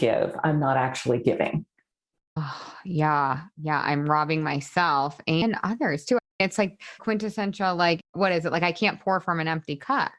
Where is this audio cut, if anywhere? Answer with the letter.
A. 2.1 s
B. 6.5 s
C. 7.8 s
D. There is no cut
D